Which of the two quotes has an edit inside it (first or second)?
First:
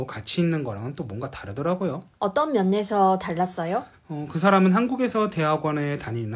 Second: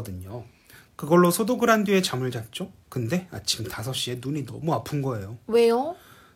first